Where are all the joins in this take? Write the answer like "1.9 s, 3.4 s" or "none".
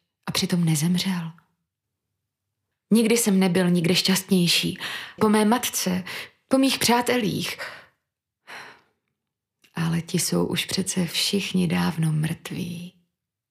2.7 s, 5.2 s